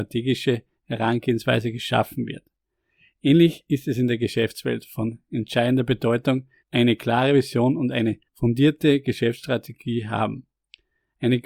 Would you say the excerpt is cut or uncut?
cut